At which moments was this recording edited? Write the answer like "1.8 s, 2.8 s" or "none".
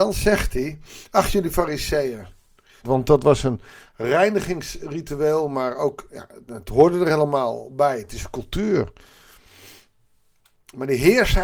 2.8 s, 6.4 s